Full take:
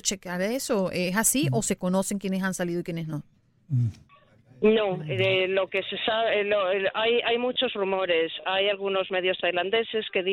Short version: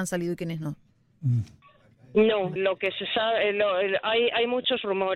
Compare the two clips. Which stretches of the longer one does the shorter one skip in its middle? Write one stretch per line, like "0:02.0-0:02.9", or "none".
0:05.0-0:05.5